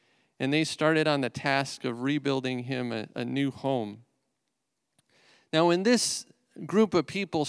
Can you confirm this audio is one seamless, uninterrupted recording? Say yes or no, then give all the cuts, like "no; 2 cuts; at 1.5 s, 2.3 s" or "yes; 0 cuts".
yes; 0 cuts